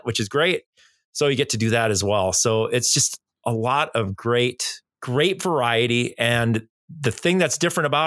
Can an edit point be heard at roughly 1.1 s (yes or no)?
no